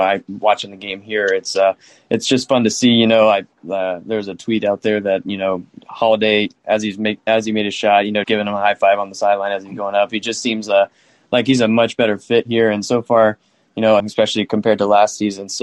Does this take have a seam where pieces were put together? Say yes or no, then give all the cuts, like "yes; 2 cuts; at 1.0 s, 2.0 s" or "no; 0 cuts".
yes; 2 cuts; at 8.2 s, 14.0 s